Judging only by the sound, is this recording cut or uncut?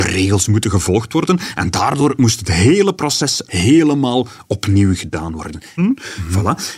cut